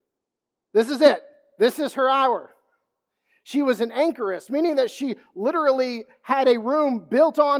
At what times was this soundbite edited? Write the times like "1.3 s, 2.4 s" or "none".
4.5 s